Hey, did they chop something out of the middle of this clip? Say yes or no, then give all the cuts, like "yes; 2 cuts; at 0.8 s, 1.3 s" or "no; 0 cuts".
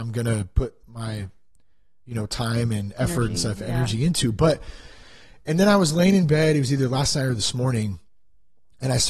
no; 0 cuts